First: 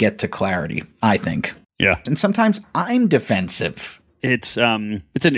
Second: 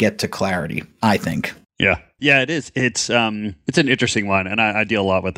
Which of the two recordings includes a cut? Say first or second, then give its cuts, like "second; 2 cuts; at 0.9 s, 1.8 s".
first; 2 cuts; at 2.1 s, 4.2 s